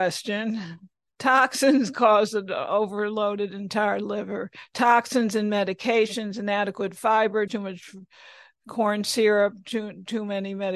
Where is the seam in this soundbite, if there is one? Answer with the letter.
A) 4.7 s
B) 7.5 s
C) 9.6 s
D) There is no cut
B